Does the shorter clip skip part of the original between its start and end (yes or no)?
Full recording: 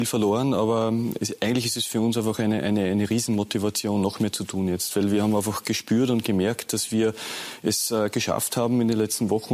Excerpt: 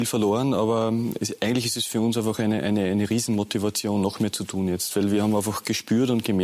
no